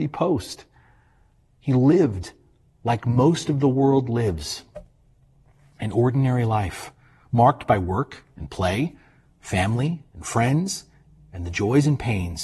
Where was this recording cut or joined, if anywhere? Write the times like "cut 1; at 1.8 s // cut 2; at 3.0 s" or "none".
none